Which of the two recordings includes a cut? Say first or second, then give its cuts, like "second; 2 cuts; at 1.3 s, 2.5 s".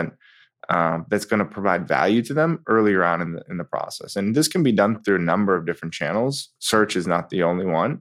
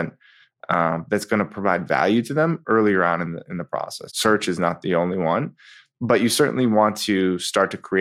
second; 1 cut; at 4.1 s